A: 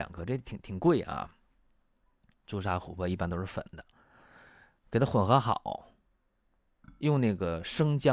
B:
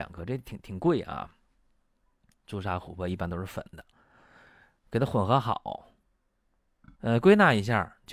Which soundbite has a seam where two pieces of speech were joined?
B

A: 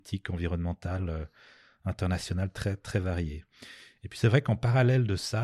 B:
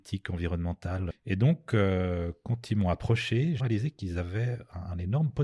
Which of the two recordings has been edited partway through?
B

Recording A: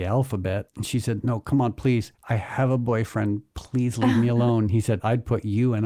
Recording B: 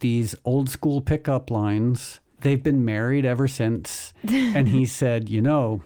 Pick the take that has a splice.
B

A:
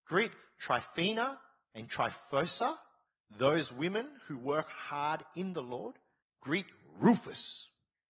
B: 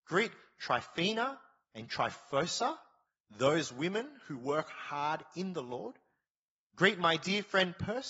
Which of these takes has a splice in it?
A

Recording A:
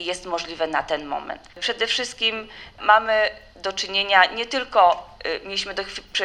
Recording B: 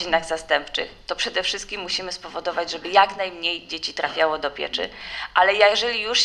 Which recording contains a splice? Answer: A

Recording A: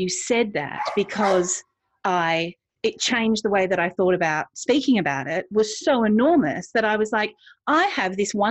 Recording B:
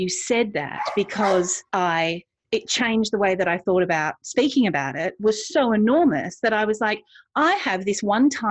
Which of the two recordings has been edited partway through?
B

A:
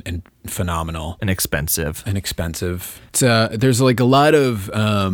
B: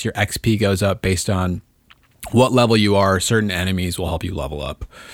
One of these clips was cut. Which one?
A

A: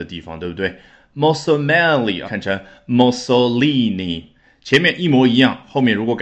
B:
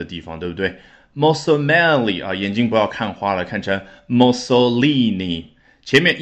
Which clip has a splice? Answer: A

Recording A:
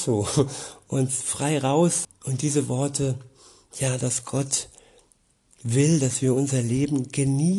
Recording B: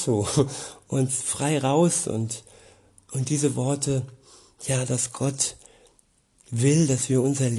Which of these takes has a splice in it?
A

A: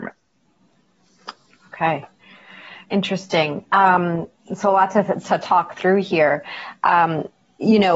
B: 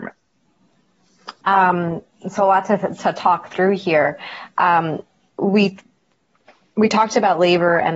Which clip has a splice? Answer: B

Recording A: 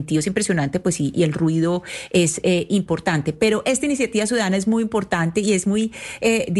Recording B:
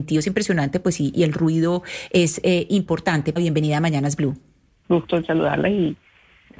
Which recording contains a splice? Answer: B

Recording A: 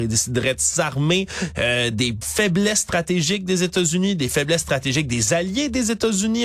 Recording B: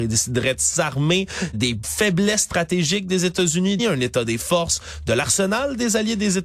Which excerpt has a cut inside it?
B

